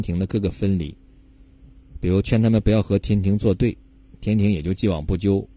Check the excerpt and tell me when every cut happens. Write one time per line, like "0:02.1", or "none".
none